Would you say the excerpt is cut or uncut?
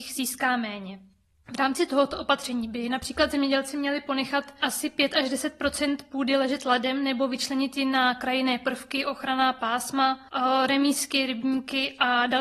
uncut